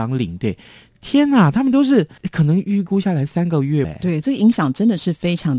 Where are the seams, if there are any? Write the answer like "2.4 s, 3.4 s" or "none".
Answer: 2.2 s, 3.8 s